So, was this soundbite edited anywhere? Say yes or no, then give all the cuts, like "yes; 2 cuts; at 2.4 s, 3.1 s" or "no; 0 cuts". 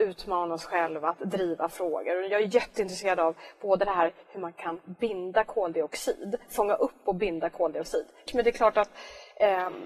yes; 1 cut; at 8.3 s